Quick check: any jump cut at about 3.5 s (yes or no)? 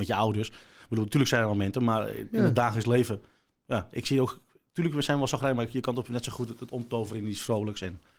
no